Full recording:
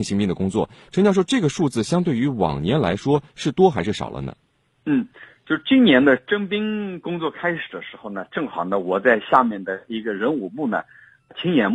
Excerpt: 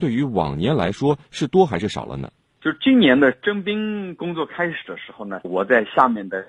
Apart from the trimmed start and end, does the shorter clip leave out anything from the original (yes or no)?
yes